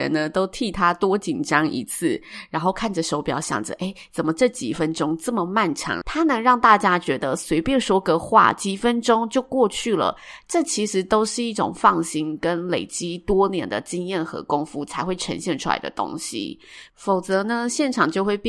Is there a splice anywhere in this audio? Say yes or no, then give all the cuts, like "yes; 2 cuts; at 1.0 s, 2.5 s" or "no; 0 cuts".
yes; 1 cut; at 6.0 s